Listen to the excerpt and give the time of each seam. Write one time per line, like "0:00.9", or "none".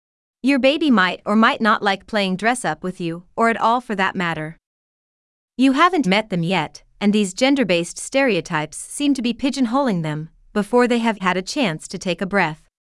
0:06.0
0:11.2

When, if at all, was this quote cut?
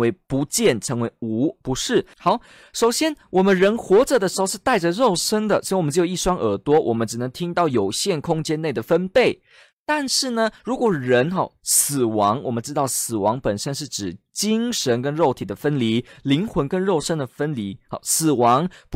0:02.1

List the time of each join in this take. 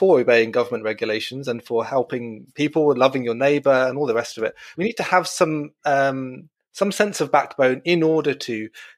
0:04.7

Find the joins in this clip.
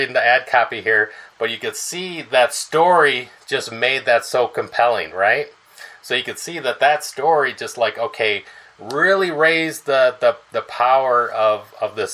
none

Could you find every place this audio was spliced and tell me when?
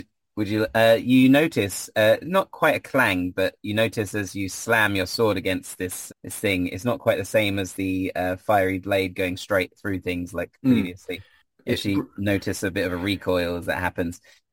0:06.1

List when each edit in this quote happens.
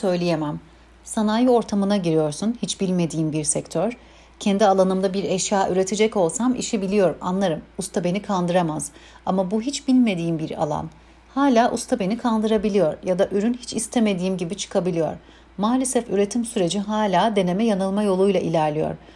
none

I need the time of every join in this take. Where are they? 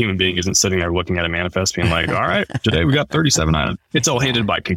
none

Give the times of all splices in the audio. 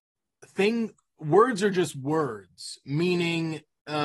none

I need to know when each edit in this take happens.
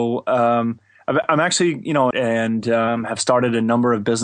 0:02.1

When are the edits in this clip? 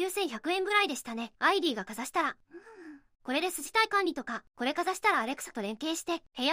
0:01.3

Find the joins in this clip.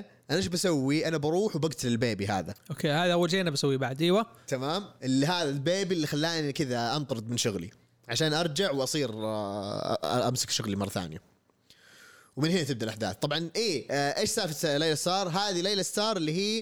none

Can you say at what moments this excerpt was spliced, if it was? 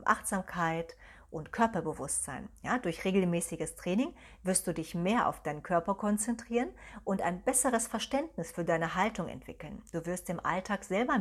none

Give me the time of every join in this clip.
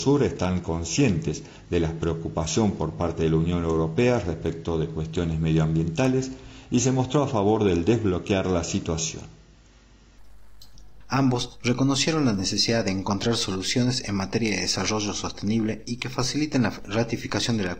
0:11.0

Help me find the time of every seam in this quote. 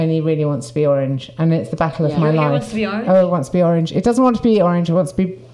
none

